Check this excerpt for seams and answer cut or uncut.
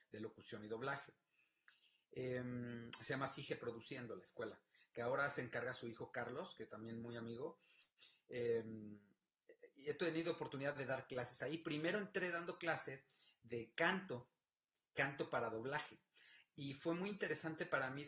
uncut